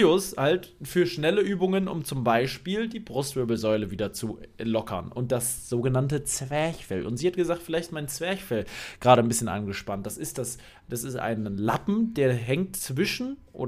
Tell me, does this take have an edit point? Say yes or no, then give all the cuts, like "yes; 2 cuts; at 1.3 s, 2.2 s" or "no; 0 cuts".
no; 0 cuts